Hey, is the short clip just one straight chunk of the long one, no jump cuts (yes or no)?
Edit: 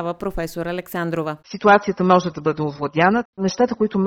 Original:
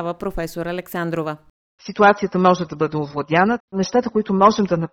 no